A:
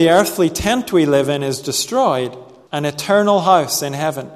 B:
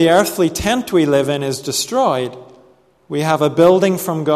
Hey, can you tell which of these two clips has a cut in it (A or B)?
A